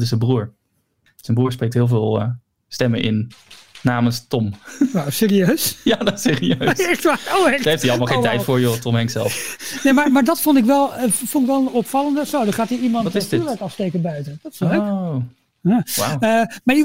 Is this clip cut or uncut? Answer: uncut